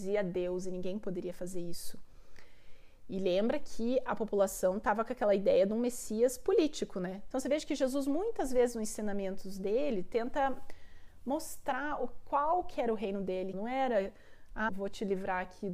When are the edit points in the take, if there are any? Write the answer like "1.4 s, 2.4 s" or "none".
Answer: 7.3 s, 13.5 s, 14.7 s